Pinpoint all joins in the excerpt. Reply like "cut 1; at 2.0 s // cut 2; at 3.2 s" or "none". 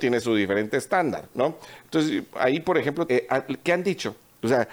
cut 1; at 1.8 s // cut 2; at 3.1 s